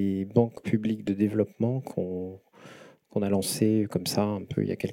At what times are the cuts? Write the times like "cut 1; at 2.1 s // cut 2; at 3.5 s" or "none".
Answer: none

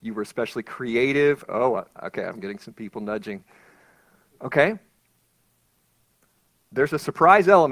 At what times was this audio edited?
none

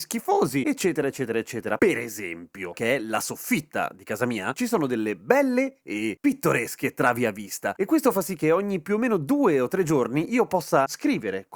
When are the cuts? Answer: cut 1; at 2.7 s // cut 2; at 4.5 s

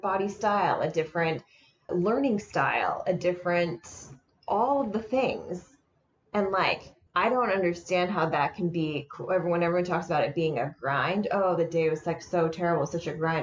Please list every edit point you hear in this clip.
none

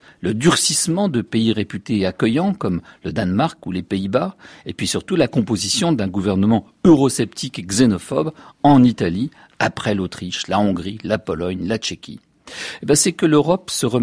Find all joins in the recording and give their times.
none

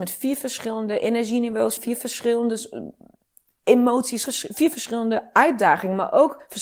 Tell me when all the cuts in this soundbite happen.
cut 1; at 1.8 s // cut 2; at 4.3 s

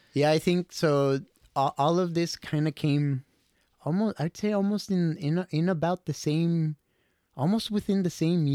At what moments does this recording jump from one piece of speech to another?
none

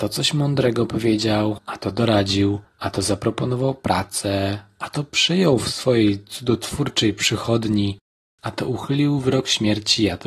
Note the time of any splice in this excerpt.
none

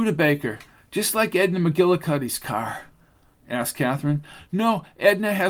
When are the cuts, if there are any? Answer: cut 1; at 3.3 s

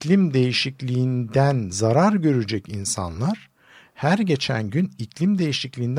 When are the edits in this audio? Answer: none

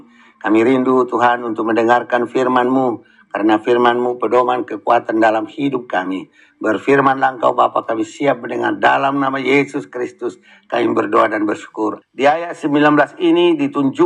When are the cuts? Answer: cut 1; at 12.0 s

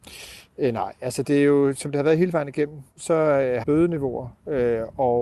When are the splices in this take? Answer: cut 1; at 3.6 s

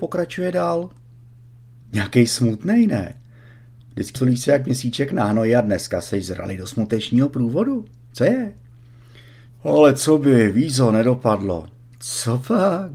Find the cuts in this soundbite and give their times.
cut 1; at 1.8 s // cut 2; at 4.2 s // cut 3; at 9.5 s

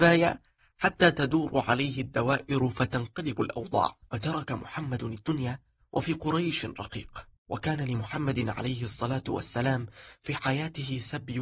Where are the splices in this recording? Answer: cut 1; at 4.1 s // cut 2; at 7.4 s

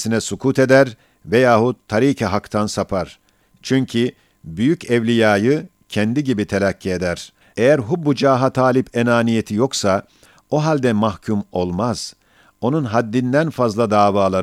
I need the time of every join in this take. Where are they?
cut 1; at 7.4 s

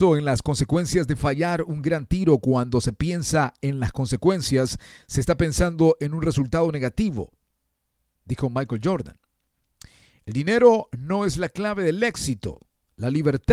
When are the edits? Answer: none

